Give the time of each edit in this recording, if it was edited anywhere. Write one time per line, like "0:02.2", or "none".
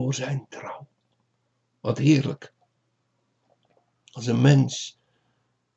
none